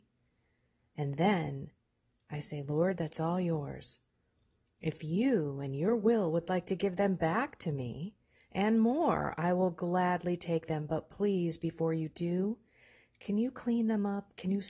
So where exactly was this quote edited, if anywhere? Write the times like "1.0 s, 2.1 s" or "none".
none